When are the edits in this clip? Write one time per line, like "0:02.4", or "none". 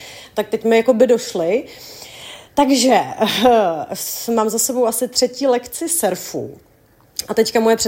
none